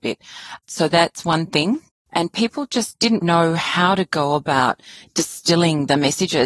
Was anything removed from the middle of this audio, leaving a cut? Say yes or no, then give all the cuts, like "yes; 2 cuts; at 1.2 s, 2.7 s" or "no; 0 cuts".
yes; 2 cuts; at 2.1 s, 3.2 s